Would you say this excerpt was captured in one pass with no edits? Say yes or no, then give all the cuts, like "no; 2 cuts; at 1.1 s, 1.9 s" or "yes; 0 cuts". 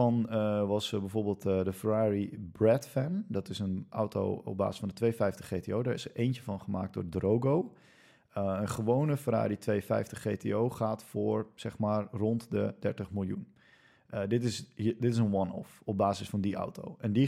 yes; 0 cuts